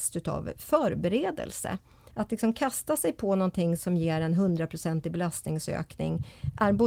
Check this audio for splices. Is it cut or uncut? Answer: cut